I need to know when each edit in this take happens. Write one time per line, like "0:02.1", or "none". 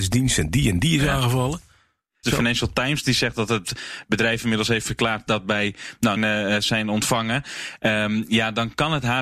0:02.2
0:06.2